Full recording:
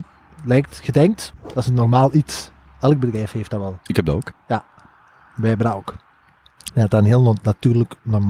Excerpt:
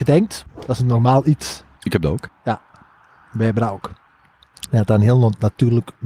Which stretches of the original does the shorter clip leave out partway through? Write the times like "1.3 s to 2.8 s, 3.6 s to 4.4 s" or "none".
2.6 s to 3.8 s